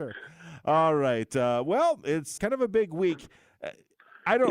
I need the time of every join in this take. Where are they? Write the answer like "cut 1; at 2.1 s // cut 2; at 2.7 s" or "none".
cut 1; at 2.4 s